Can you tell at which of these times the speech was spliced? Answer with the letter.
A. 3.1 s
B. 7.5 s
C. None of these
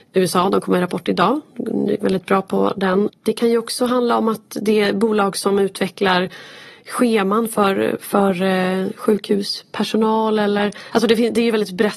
A